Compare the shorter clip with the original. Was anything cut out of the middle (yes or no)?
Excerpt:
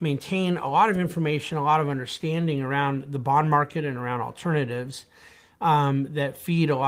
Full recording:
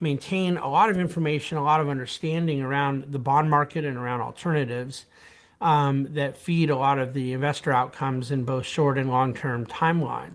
no